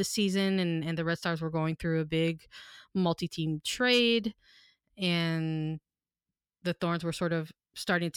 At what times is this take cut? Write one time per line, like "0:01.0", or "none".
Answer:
none